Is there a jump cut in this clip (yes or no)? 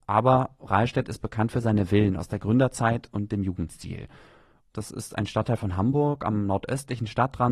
yes